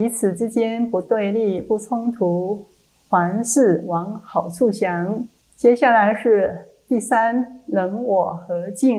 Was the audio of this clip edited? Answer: yes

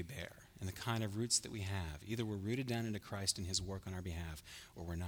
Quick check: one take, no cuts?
yes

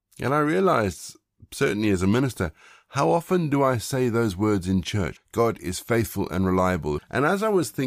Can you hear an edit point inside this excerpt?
yes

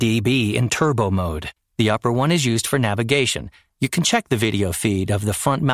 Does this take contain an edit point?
yes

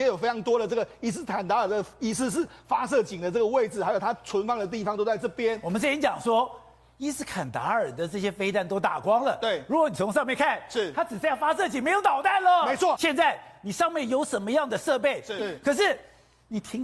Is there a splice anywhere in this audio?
yes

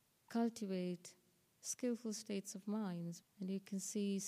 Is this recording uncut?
no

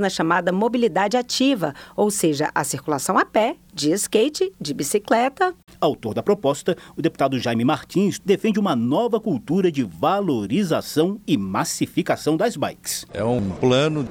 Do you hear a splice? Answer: yes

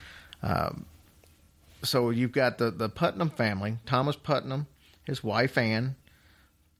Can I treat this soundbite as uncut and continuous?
yes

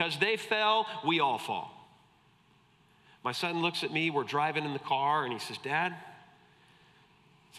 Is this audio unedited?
yes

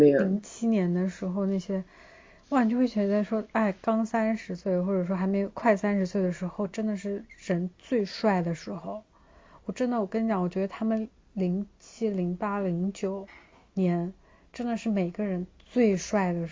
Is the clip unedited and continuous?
yes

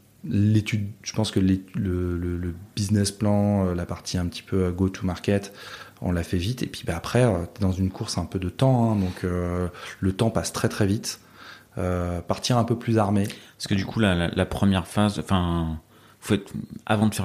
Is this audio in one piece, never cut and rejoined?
yes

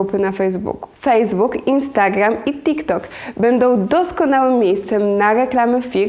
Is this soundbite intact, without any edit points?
no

